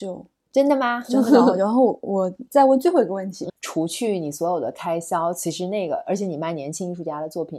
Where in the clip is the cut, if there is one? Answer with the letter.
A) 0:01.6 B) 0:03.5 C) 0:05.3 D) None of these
B